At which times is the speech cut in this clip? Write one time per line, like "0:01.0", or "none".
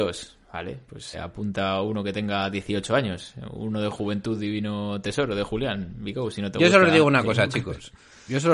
0:01.1